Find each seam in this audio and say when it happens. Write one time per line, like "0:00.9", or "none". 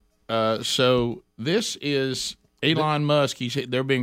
0:01.3

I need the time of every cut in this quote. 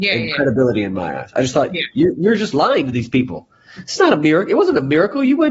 none

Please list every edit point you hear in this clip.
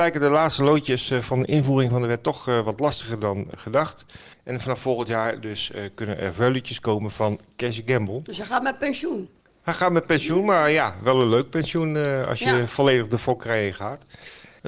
0:04.3

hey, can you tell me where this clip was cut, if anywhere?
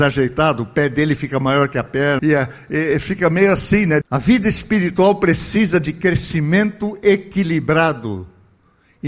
0:02.2
0:04.0

